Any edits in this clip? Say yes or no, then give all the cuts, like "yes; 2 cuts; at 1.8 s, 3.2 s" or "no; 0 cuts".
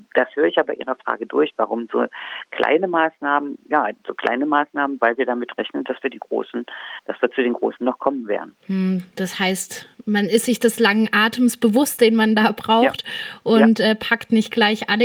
no; 0 cuts